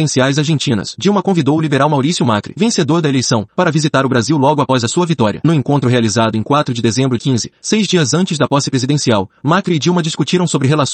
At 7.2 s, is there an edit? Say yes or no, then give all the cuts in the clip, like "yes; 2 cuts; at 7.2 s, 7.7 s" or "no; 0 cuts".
yes; 1 cut; at 7.2 s